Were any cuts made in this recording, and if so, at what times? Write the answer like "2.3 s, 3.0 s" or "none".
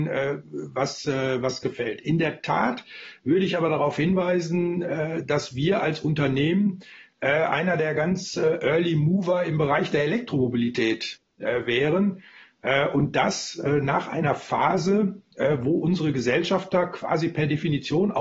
none